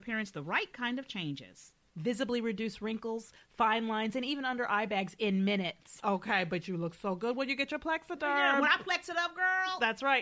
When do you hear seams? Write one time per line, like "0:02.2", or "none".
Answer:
0:06.0